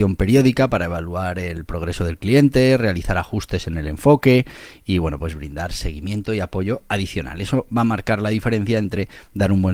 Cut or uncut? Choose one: uncut